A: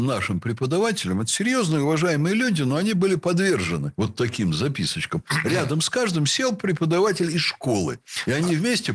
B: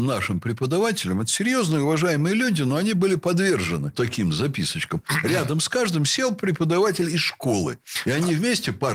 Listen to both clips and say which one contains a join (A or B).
B